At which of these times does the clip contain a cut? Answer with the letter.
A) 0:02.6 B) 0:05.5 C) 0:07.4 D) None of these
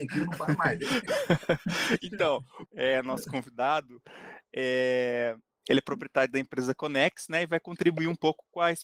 A